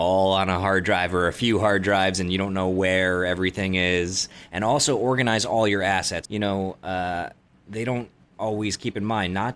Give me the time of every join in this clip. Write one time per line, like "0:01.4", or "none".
0:06.2